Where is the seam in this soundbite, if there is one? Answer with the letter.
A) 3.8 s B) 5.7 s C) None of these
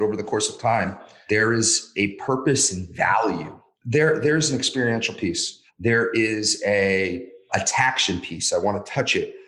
B